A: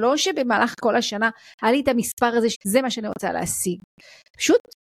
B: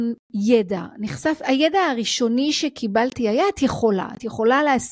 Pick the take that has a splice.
A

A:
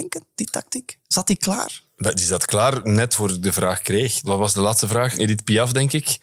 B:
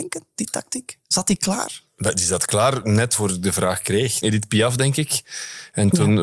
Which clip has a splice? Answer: B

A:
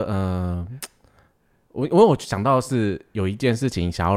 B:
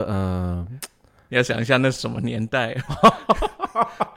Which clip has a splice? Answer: B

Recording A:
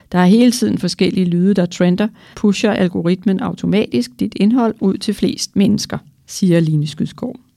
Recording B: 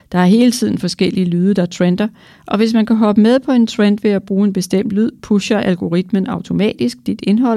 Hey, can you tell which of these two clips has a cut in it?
A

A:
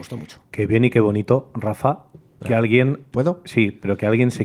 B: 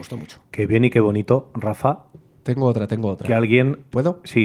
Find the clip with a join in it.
A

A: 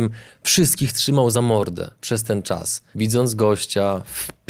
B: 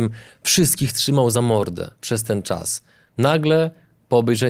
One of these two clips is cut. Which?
A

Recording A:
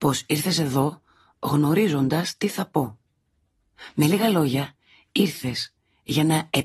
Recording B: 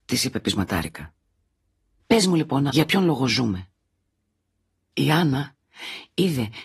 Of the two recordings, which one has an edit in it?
B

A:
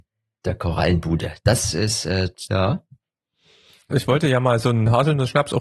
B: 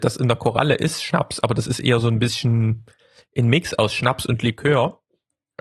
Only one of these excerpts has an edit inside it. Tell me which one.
A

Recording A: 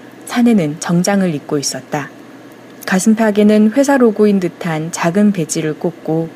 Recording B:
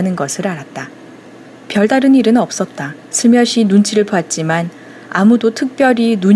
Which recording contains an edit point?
B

